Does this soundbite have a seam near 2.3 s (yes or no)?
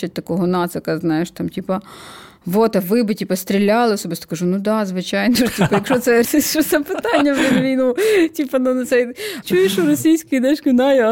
no